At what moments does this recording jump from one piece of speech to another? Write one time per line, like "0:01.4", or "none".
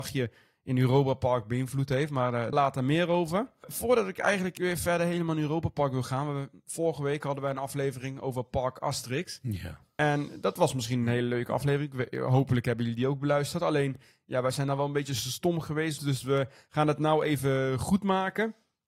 0:02.5
0:16.0